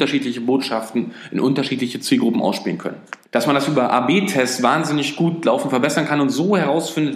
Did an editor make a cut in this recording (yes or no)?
yes